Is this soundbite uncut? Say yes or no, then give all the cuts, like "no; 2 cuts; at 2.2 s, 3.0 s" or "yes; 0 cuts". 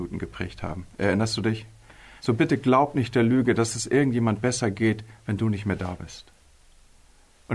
no; 1 cut; at 2.2 s